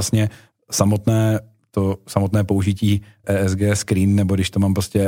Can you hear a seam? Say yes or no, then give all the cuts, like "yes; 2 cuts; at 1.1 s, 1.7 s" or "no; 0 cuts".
yes; 1 cut; at 3.2 s